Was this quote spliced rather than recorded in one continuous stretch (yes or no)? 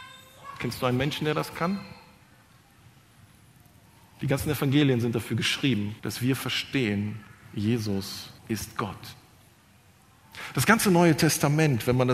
yes